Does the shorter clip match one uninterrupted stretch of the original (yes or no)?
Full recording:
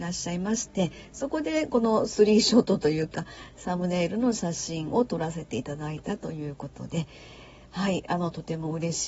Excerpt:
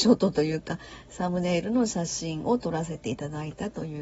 yes